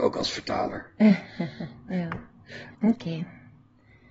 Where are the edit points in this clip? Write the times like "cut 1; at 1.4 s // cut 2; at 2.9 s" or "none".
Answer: cut 1; at 2.7 s